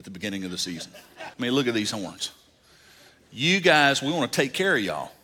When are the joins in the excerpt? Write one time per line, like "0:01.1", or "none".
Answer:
0:01.3